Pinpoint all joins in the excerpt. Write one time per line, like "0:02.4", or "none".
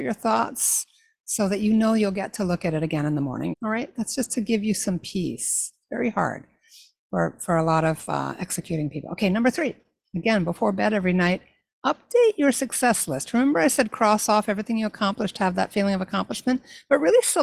0:03.5